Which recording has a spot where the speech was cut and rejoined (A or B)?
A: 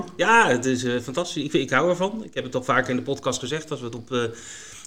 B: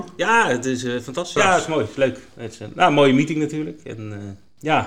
B